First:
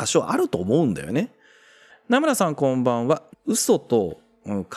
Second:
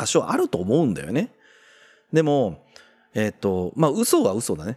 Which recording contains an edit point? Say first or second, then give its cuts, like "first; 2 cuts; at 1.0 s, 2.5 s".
first; 2 cuts; at 1.9 s, 3.3 s